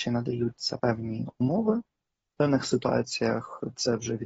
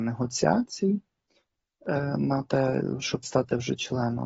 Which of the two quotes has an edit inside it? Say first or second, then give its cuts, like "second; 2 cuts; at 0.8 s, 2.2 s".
first; 1 cut; at 2.3 s